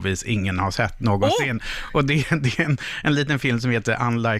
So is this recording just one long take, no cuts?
yes; 0 cuts

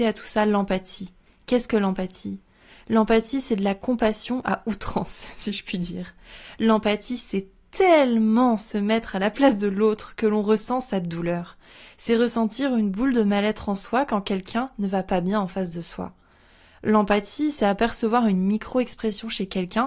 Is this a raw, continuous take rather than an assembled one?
yes; 0 cuts

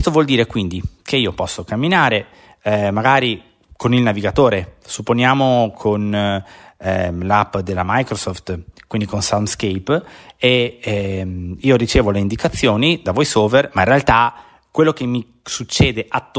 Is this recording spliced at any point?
no; 0 cuts

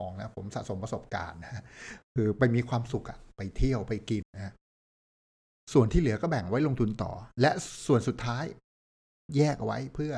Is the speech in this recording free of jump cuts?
no; 1 cut; at 4.2 s

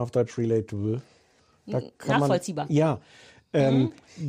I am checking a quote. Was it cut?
no; 0 cuts

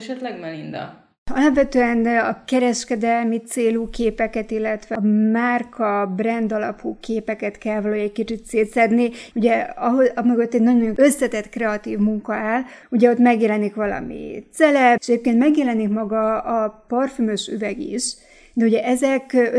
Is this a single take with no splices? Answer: no; 3 cuts; at 9.3 s, 12.8 s, 15.0 s

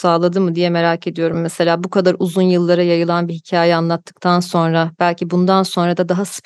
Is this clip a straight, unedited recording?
yes; 0 cuts

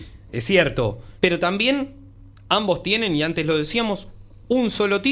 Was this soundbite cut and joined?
yes; 1 cut; at 1.2 s

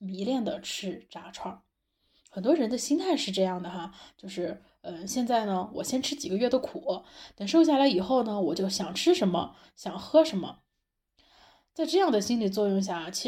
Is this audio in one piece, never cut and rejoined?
yes; 0 cuts

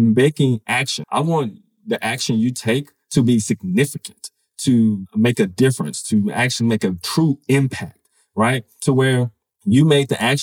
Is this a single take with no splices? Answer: no; 1 cut; at 1.0 s

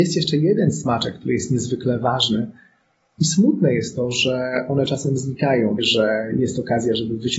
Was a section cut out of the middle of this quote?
yes; 2 cuts; at 3.1 s, 5.8 s

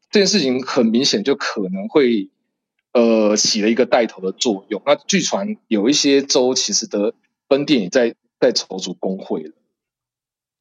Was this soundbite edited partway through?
no; 0 cuts

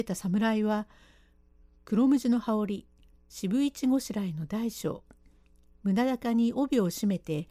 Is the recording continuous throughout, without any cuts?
yes; 0 cuts

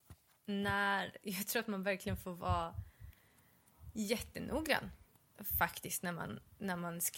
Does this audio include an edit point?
no; 0 cuts

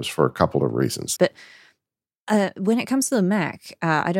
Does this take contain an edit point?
yes; 1 cut; at 1.2 s

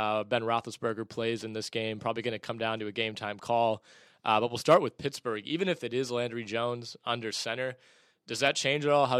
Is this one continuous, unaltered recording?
yes; 0 cuts

